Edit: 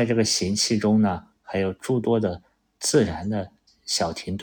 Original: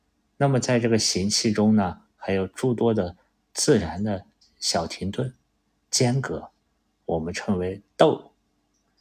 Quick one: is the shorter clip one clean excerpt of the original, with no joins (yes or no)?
yes